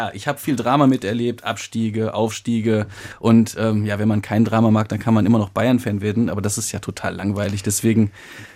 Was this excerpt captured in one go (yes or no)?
yes